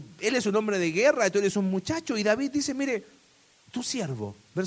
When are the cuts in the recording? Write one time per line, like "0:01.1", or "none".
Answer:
none